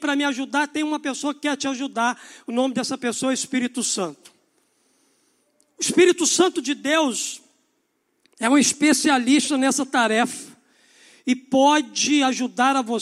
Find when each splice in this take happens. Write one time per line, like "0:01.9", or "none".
none